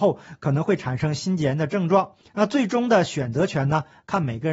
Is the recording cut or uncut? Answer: cut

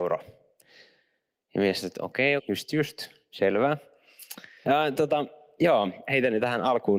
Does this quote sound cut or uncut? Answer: cut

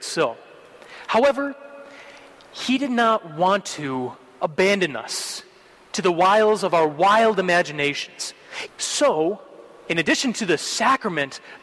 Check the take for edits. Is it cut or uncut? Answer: cut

